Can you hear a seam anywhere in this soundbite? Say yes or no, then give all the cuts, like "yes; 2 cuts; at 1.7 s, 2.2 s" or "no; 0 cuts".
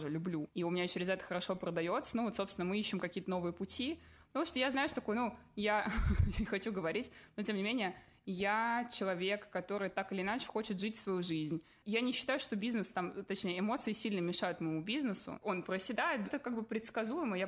yes; 1 cut; at 16.2 s